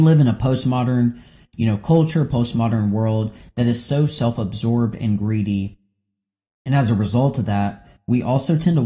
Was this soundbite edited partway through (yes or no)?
no